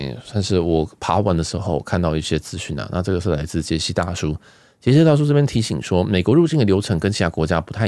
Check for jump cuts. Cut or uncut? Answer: uncut